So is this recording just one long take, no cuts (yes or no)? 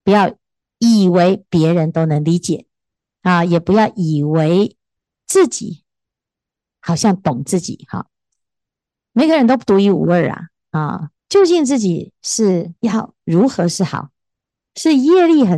no